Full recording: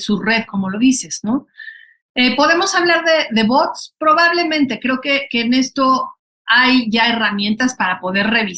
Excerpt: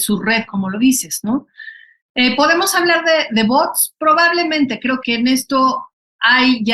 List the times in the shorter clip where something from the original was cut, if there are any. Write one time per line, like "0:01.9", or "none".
0:05.0